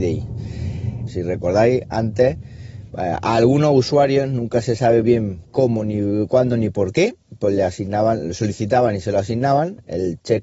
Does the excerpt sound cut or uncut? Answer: cut